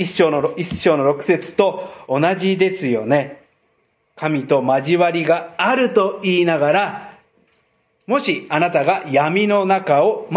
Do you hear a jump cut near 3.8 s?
no; 0 cuts

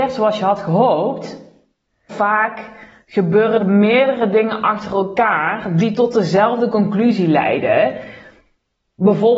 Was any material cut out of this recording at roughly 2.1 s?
yes; 2 cuts; at 2.1 s, 3.6 s

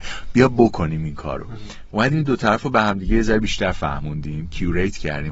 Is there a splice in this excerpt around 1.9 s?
yes; 1 cut; at 1.9 s

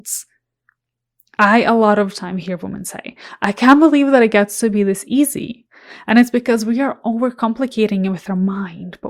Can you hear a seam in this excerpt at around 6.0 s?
no; 0 cuts

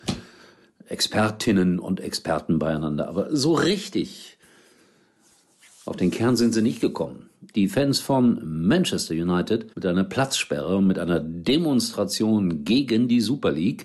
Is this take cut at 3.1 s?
no; 2 cuts; at 7.5 s, 9.7 s

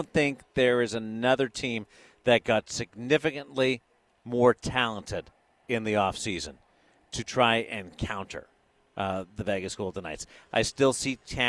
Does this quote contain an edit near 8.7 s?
no; 1 cut; at 10.4 s

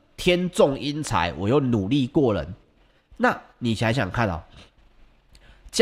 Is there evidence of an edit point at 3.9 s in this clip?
yes; 1 cut; at 3.9 s

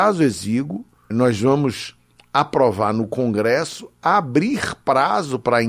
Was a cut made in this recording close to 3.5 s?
no; 1 cut; at 1.1 s

